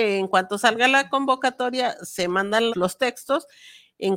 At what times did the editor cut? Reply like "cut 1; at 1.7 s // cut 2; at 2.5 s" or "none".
cut 1; at 2.7 s

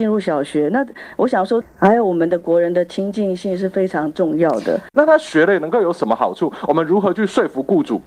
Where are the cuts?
cut 1; at 1.6 s // cut 2; at 4.9 s

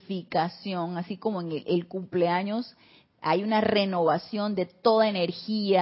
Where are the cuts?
cut 1; at 1.6 s

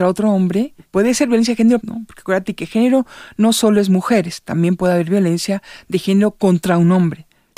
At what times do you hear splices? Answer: cut 1; at 1.8 s

